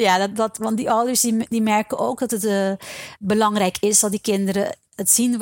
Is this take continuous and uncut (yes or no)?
yes